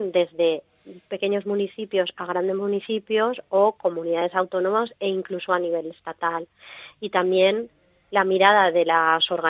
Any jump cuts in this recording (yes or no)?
no